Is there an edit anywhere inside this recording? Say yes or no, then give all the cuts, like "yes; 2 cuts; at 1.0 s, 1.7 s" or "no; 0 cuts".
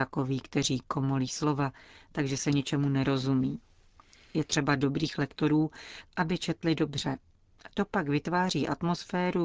yes; 1 cut; at 6.0 s